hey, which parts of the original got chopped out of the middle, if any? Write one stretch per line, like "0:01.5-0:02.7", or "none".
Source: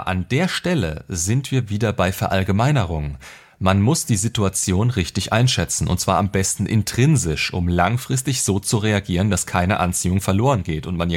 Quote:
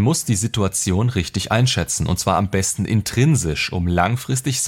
none